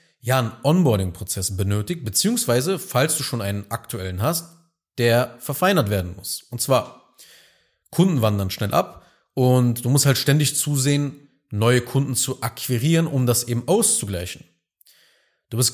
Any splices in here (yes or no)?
no